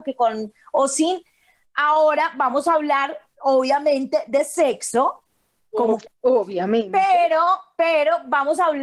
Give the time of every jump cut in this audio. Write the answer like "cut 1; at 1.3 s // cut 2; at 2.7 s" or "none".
cut 1; at 6.1 s